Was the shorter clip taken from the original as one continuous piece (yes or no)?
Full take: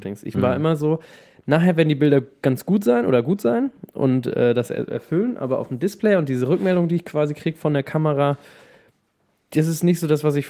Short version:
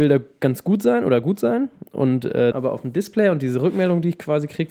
no